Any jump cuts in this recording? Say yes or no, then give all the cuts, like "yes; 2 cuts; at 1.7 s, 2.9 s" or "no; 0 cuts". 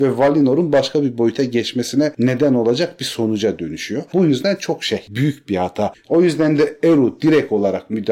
yes; 2 cuts; at 4.1 s, 5.9 s